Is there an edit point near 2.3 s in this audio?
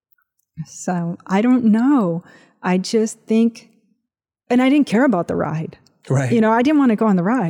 no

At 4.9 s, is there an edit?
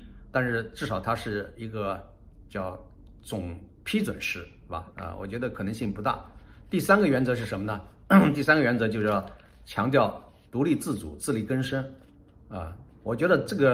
yes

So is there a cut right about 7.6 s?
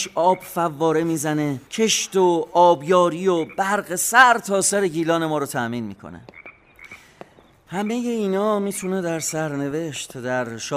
no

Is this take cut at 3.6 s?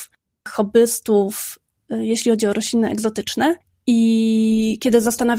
no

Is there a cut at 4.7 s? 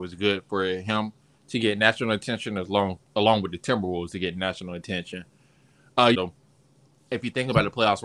no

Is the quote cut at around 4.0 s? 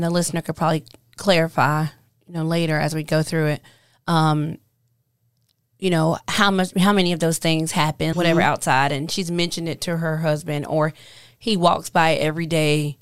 no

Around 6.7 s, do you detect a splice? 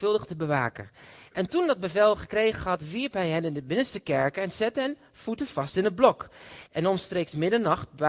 no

